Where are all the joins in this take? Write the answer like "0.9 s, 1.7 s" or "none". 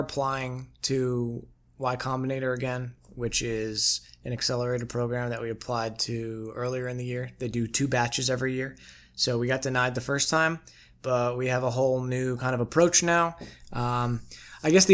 none